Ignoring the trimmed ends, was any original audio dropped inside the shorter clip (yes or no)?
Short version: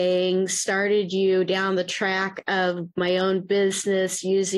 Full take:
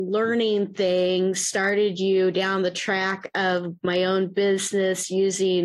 no